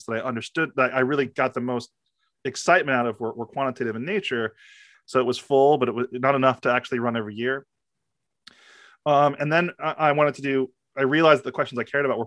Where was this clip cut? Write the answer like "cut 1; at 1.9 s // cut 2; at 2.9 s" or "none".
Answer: cut 1; at 4.9 s